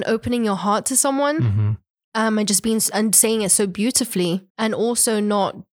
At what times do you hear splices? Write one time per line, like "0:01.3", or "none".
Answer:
0:04.5